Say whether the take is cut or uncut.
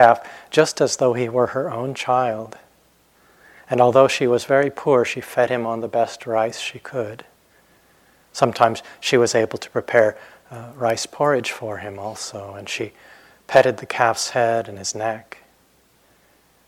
uncut